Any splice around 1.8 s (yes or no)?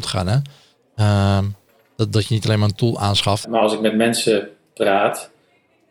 no